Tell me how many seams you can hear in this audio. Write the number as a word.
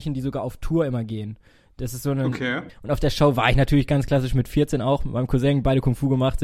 one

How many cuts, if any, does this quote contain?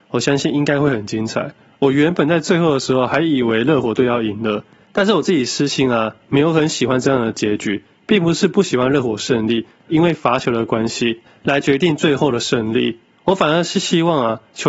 two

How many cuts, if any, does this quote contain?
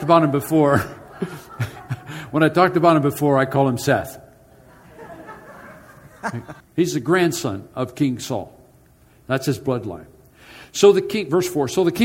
one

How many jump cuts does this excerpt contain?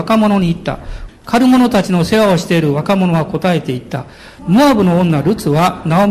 two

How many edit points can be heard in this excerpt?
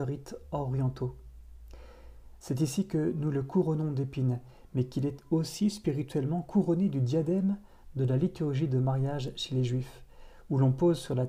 one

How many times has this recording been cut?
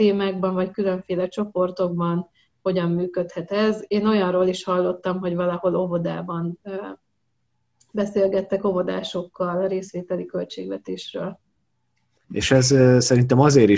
one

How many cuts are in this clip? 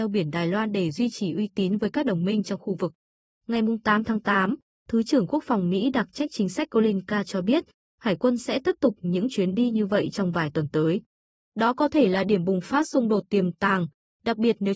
zero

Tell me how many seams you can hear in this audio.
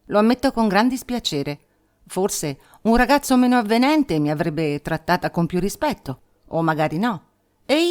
zero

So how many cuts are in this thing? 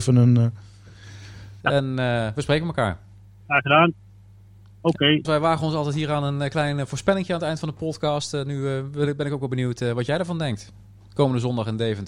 two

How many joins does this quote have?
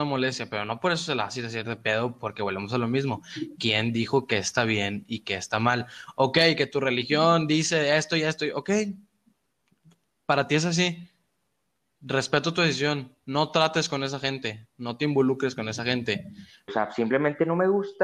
one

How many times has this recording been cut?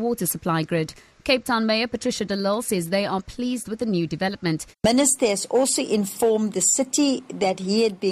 one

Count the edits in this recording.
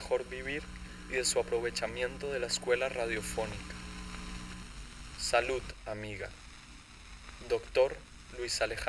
zero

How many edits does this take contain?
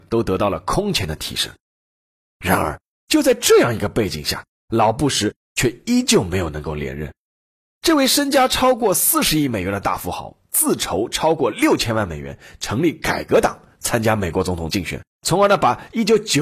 two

